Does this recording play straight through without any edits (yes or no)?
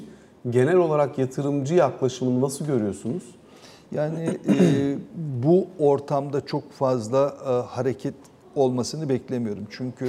yes